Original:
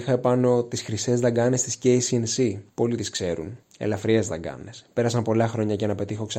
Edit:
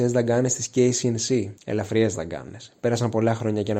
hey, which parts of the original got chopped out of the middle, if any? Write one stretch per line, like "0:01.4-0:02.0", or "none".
0:02.6-0:03.7